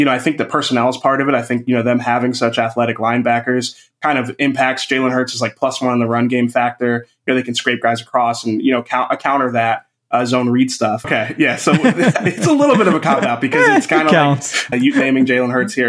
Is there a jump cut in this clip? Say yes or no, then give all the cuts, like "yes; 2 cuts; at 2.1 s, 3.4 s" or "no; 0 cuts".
yes; 2 cuts; at 11.0 s, 14.7 s